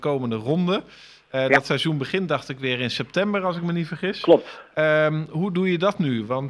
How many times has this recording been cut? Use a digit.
0